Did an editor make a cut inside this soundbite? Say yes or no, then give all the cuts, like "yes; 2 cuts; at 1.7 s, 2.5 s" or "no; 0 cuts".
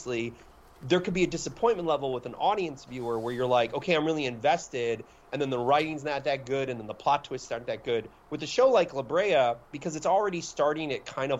no; 0 cuts